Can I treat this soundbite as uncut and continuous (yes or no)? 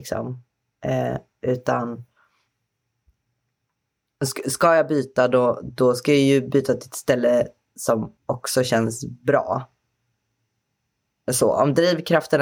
no